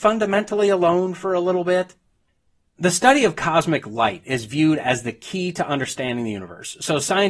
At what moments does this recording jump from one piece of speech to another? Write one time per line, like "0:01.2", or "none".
none